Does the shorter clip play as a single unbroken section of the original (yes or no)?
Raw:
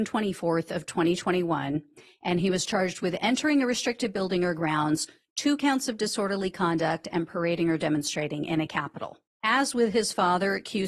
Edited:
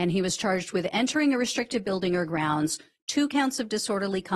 yes